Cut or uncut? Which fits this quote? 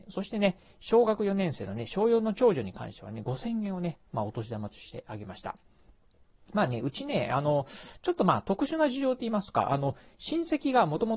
uncut